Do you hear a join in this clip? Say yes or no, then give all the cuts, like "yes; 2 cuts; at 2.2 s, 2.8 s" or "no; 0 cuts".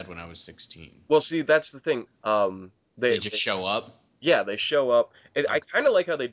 yes; 1 cut; at 2.1 s